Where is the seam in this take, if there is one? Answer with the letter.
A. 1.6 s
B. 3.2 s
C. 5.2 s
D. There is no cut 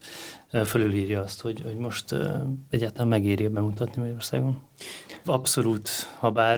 C